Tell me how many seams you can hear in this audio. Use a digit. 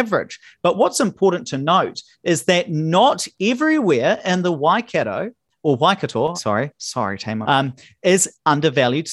2